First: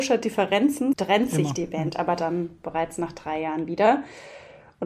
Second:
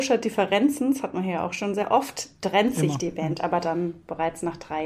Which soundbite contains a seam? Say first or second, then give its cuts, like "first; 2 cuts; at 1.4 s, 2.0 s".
first; 1 cut; at 0.9 s